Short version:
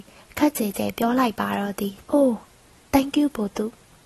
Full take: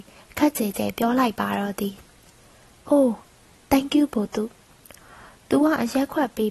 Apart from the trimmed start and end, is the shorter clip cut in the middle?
yes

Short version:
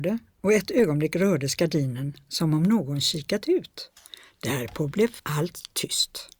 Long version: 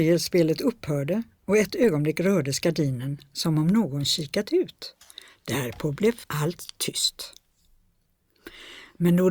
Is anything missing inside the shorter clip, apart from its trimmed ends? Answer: no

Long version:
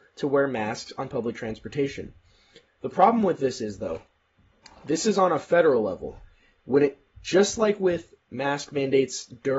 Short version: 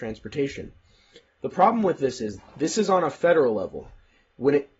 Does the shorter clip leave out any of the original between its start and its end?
yes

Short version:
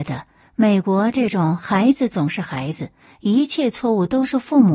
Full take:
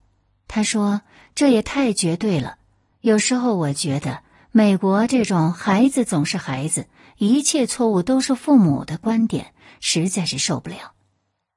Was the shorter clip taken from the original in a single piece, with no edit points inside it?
yes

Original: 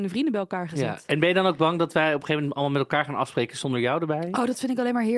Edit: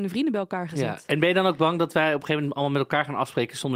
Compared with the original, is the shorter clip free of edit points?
yes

